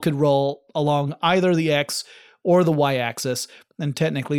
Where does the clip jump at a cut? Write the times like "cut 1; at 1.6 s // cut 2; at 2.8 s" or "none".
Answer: none

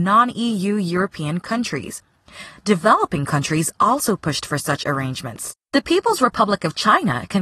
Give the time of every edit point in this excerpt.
cut 1; at 5.6 s

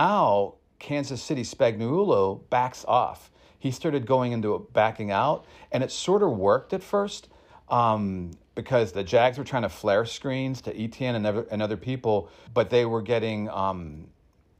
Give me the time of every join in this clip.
cut 1; at 8.9 s // cut 2; at 12.5 s

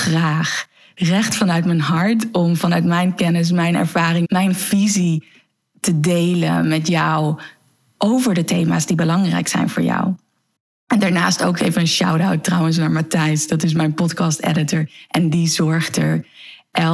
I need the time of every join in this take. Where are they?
cut 1; at 4.2 s

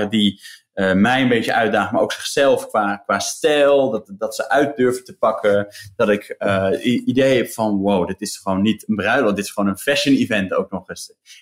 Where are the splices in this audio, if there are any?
none

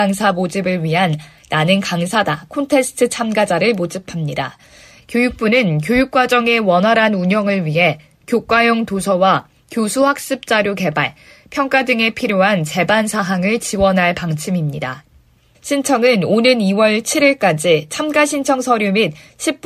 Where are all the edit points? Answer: cut 1; at 5.0 s // cut 2; at 15.5 s

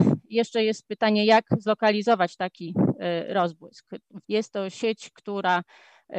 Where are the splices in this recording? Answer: cut 1; at 4.2 s

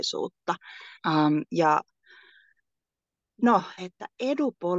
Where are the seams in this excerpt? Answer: cut 1; at 1.0 s // cut 2; at 3.8 s

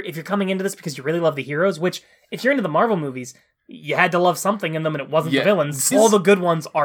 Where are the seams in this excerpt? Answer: cut 1; at 5.9 s

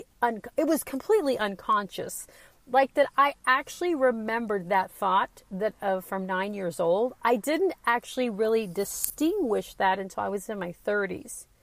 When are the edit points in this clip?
none

